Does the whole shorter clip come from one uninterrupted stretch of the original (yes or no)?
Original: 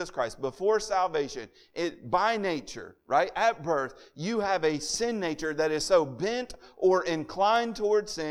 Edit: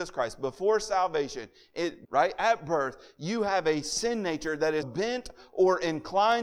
no